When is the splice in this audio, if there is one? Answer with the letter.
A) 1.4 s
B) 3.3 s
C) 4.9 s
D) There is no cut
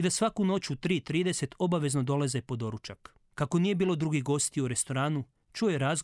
B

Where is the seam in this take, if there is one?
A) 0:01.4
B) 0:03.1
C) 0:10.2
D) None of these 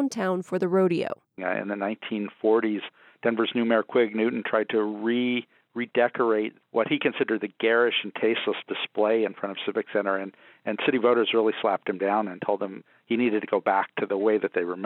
A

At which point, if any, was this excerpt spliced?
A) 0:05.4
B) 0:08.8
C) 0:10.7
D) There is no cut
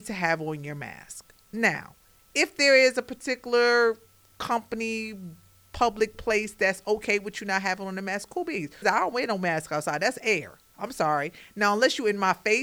B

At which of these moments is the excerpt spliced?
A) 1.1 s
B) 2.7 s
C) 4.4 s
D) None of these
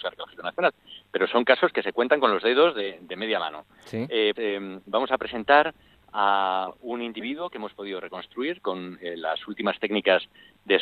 C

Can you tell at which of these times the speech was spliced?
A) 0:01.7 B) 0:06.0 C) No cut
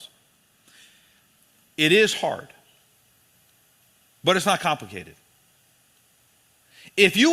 A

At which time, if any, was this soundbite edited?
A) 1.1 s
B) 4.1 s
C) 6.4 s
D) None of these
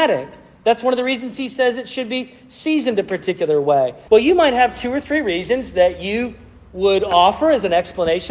B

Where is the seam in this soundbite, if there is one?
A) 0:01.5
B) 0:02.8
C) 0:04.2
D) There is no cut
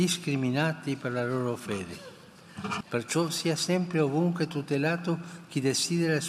B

